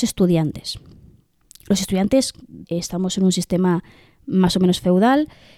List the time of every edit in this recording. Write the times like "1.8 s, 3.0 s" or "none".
2.6 s